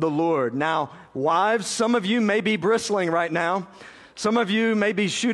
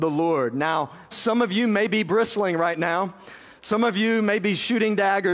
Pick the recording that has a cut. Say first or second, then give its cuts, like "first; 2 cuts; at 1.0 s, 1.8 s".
second; 1 cut; at 1.1 s